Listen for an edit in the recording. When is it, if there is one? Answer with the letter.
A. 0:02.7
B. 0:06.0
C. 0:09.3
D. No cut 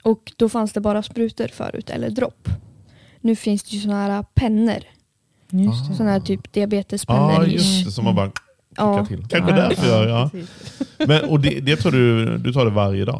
C